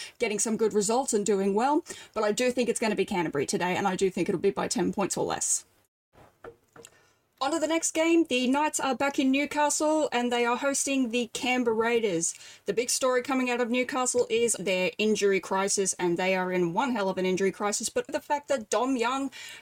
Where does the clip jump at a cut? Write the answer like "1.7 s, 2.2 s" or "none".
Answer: 14.6 s, 18.1 s